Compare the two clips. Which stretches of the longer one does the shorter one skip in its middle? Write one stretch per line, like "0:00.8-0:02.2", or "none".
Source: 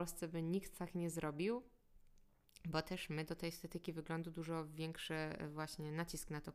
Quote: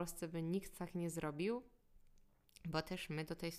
none